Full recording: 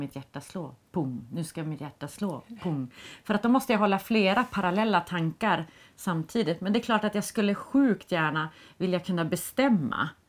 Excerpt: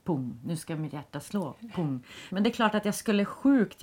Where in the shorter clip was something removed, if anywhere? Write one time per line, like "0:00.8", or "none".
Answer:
0:02.3